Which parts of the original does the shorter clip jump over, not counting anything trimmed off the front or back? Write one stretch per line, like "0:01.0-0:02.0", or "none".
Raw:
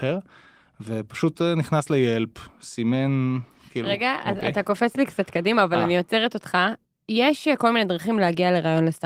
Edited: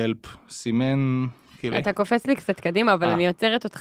0:03.8-0:04.4